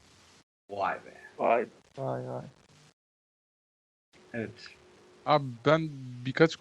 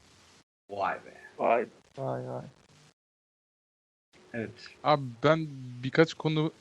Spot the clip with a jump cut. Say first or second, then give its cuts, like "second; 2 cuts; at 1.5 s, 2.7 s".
second; 1 cut; at 4.8 s